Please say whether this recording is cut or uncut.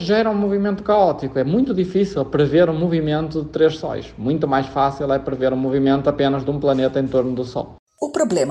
uncut